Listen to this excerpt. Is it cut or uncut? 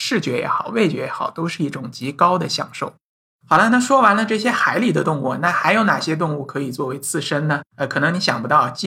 uncut